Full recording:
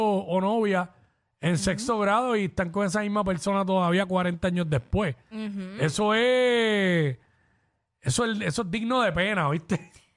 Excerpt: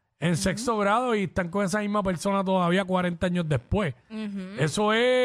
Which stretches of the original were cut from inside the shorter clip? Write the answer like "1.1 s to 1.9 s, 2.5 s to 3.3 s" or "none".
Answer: none